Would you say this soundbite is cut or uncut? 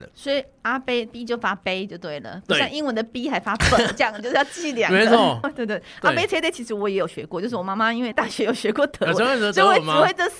cut